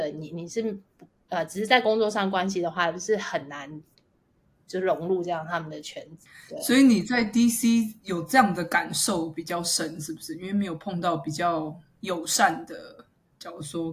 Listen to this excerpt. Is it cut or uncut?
uncut